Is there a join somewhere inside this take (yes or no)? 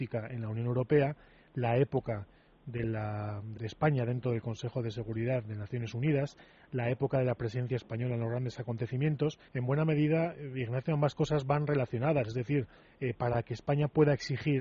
yes